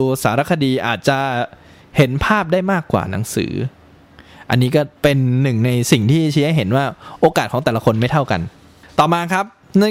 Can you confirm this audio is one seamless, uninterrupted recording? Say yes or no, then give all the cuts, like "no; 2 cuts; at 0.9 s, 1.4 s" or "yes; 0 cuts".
no; 1 cut; at 5.0 s